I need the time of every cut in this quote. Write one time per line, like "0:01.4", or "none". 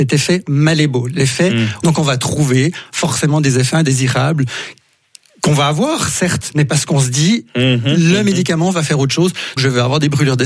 0:01.8
0:09.6